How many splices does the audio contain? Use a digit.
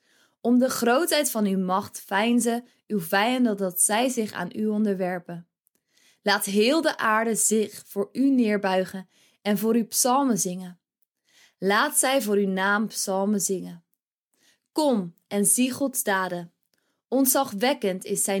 0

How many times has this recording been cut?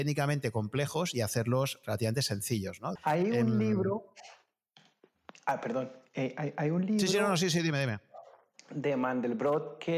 1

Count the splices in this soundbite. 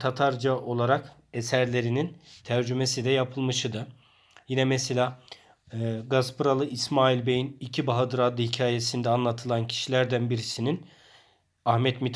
0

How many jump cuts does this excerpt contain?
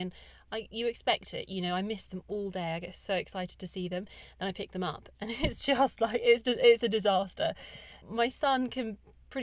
1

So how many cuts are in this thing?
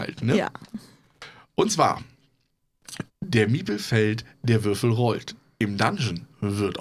1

